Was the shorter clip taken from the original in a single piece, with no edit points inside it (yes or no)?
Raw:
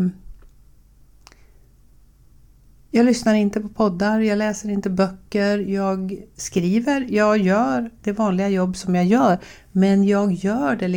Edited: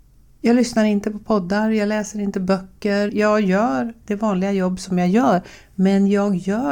no